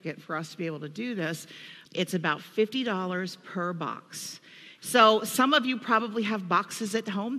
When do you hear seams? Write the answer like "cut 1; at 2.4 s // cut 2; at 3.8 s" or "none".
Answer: cut 1; at 1.9 s // cut 2; at 4.8 s